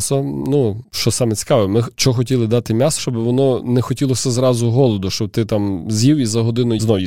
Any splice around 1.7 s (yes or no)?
no